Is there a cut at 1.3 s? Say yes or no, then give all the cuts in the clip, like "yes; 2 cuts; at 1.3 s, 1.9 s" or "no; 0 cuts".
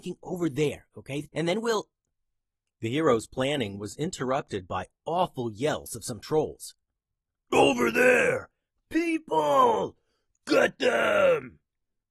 yes; 1 cut; at 1.3 s